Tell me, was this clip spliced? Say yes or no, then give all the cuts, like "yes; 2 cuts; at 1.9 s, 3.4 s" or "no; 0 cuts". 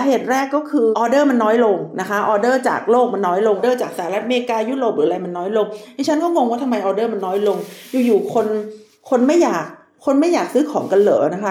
yes; 2 cuts; at 0.9 s, 3.6 s